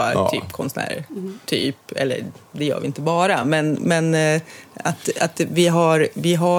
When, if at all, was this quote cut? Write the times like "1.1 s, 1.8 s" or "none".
none